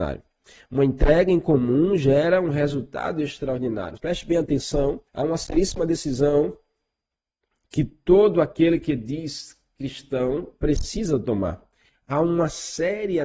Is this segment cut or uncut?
cut